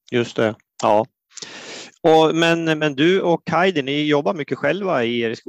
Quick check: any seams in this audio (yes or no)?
no